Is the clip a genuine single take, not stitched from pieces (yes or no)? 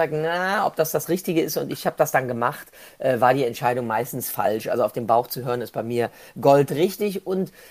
yes